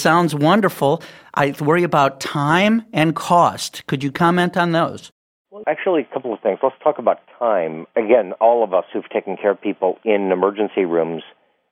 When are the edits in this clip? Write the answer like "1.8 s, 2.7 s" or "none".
5.6 s